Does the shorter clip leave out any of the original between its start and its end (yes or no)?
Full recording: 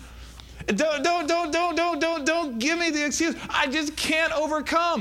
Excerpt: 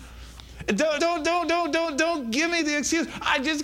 yes